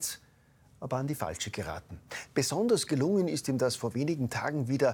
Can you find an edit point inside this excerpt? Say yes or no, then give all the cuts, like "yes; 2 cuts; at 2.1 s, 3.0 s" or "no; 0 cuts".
yes; 1 cut; at 2.3 s